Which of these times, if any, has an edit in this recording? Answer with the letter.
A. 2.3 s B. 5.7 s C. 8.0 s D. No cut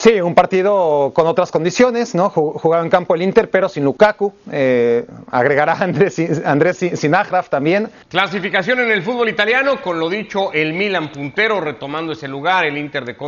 C